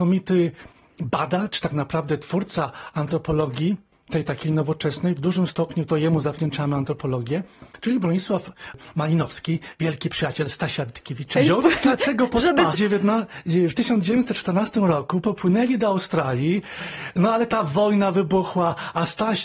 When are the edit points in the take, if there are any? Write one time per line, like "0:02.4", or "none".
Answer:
0:11.3
0:12.7